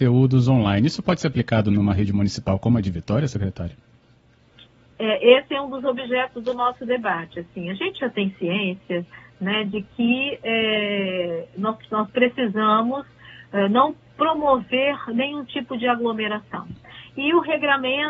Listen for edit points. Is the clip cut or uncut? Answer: uncut